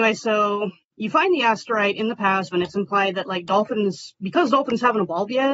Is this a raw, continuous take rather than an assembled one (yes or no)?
no